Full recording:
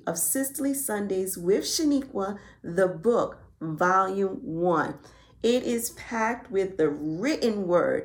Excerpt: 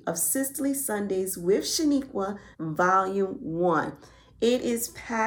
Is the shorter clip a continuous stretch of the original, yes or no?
no